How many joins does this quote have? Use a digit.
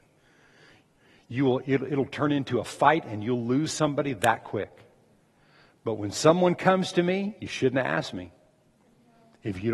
0